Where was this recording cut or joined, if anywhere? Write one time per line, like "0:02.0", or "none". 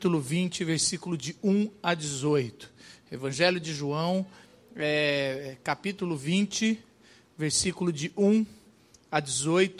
none